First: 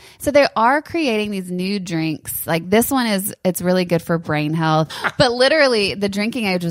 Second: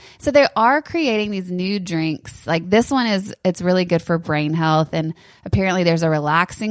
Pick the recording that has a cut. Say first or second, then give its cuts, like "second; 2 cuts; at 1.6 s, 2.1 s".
first; 1 cut; at 4.9 s